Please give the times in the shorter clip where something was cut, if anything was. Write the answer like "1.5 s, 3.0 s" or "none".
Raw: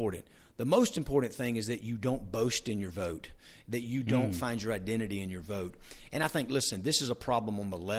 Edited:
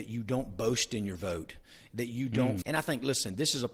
2.6 s